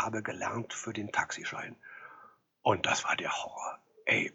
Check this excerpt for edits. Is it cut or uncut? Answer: uncut